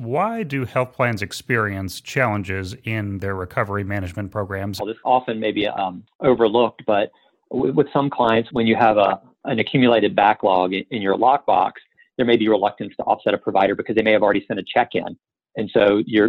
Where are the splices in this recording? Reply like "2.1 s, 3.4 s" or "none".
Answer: 4.8 s